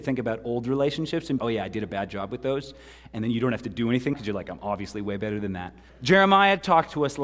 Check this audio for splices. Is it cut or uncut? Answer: cut